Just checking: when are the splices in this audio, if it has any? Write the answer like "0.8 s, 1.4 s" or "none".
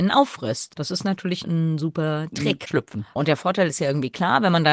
2.7 s